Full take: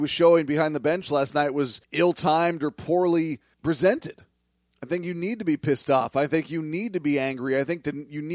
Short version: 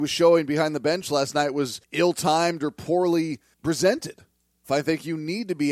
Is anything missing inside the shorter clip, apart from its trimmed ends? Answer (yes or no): yes